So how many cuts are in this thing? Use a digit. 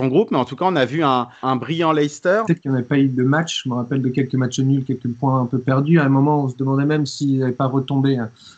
2